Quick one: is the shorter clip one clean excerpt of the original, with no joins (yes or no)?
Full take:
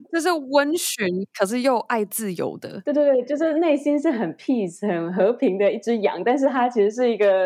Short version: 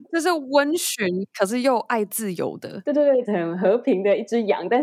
no